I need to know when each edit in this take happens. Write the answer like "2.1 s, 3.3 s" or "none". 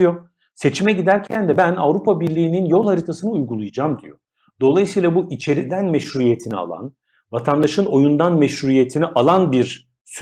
none

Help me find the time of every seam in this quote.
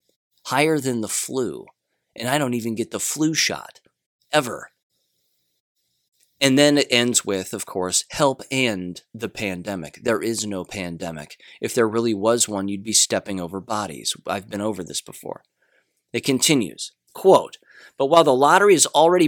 none

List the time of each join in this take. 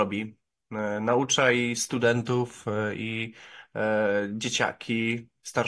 none

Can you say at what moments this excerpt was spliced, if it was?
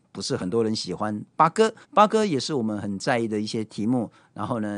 1.8 s

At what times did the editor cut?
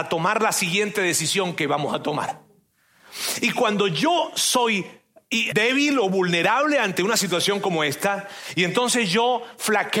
5.5 s

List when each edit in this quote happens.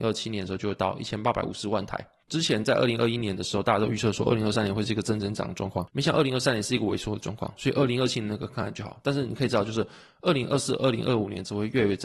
2.3 s

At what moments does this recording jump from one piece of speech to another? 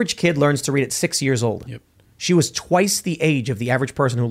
none

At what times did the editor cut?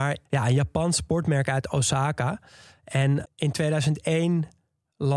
3.2 s

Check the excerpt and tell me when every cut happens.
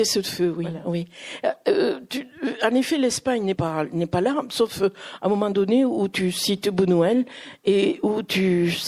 3.5 s

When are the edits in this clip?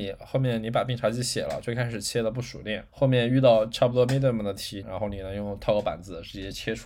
2.9 s, 4.8 s

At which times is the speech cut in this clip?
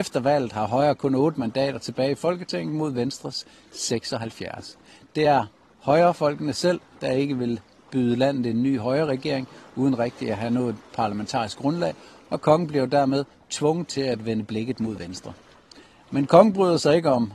none

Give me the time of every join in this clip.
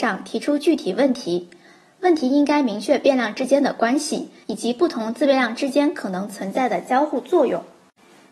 4.4 s

